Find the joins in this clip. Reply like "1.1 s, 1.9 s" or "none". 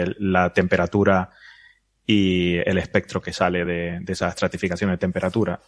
none